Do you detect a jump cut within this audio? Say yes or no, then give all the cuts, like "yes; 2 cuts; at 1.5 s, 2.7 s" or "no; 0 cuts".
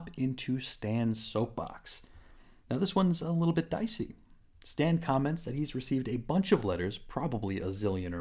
no; 0 cuts